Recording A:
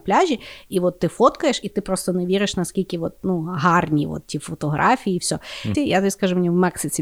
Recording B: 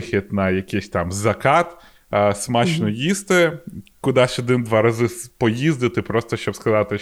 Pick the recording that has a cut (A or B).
A